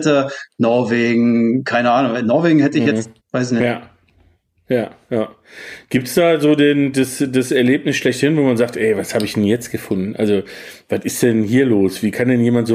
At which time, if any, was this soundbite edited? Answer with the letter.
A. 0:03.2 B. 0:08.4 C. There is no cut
A